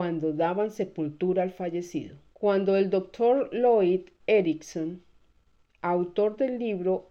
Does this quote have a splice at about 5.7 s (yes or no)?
no